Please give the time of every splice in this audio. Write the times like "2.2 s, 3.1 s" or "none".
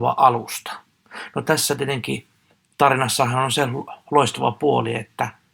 none